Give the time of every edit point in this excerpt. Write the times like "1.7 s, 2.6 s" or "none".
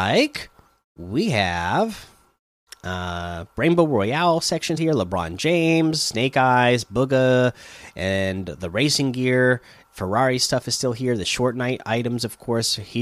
4.8 s

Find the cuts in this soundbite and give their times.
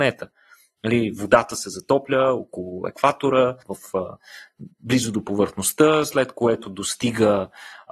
3.6 s

